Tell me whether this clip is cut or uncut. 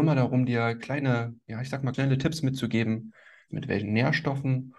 cut